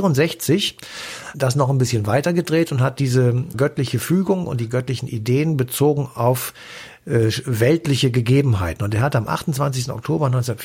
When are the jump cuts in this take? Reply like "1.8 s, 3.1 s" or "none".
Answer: 1.3 s, 3.5 s

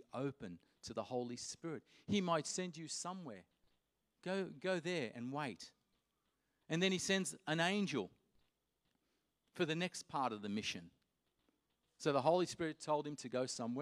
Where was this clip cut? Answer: none

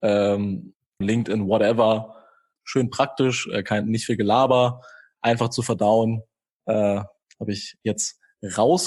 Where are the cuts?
1.0 s, 2.6 s

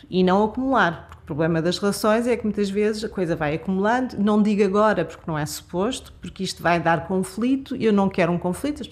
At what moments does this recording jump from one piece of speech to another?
none

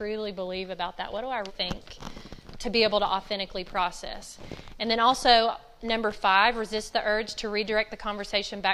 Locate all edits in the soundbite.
1.5 s

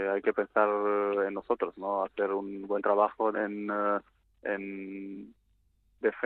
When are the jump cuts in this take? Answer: 3.3 s

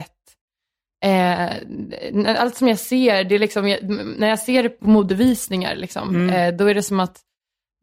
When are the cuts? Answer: 4.8 s

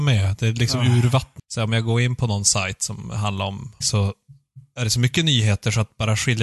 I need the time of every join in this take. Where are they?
1.4 s, 3.8 s

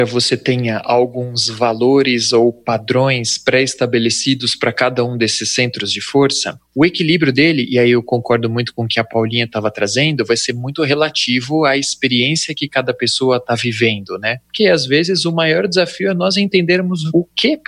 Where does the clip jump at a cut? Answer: 14.4 s

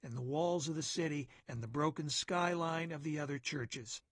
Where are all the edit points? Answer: 1.4 s

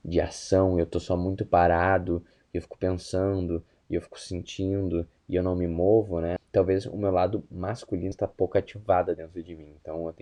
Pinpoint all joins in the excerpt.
6.4 s, 8.1 s

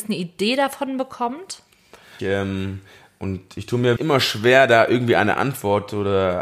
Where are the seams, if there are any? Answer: 2.2 s, 4.0 s

